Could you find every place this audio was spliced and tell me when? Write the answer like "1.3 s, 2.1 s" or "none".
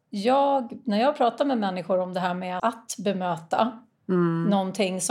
2.6 s